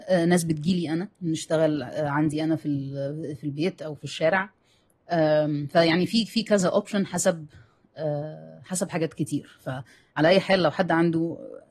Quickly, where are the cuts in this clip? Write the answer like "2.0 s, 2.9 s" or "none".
1.1 s